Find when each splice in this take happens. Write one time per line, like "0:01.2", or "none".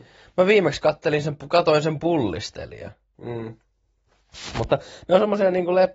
0:03.2

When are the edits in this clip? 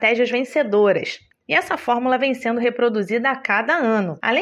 0:01.3

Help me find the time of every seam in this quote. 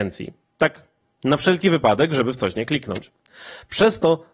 none

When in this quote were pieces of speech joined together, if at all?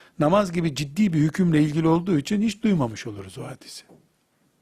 none

